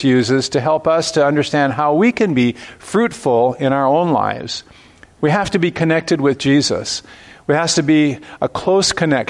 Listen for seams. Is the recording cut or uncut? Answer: uncut